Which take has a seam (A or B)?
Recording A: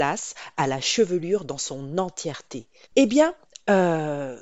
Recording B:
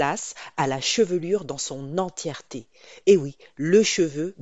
A